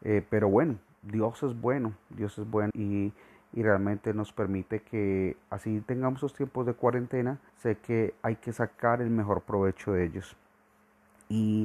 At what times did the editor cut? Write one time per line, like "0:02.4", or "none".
0:02.7
0:07.5